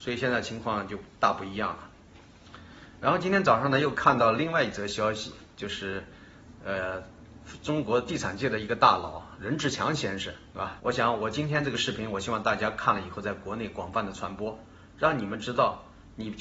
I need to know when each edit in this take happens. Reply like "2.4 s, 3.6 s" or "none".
10.8 s